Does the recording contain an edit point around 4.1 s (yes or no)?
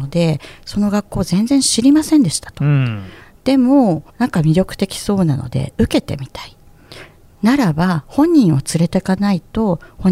yes